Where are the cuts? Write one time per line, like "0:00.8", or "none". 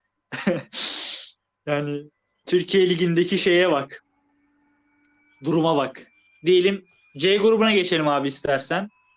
0:02.5